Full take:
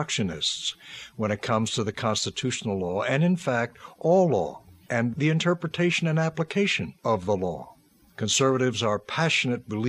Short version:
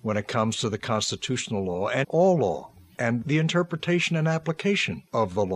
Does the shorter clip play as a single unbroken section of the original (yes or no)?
no